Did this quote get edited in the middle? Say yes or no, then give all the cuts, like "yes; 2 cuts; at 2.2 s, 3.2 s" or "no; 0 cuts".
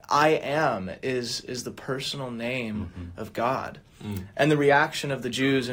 no; 0 cuts